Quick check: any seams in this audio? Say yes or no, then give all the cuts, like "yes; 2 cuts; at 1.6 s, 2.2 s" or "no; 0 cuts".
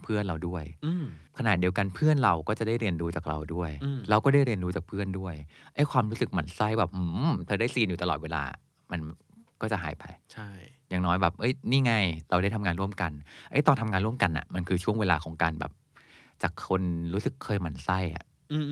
yes; 1 cut; at 1.3 s